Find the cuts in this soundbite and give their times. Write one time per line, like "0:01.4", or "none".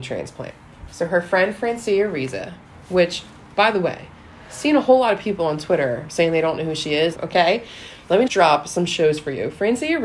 0:07.2
0:08.3